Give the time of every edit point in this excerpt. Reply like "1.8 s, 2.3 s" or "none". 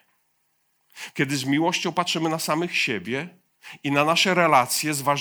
1.1 s